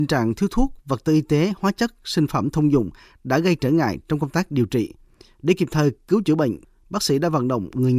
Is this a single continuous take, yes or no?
yes